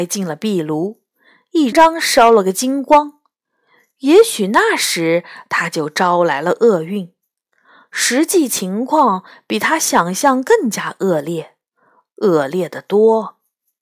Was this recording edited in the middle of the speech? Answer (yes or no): yes